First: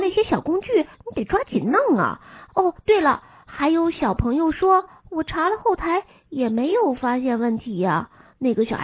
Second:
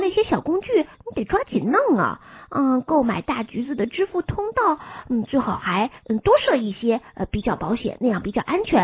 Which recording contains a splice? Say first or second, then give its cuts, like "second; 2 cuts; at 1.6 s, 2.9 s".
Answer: first; 2 cuts; at 2.5 s, 5.0 s